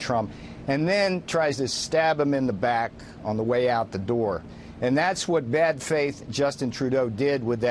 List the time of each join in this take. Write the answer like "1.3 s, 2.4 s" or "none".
none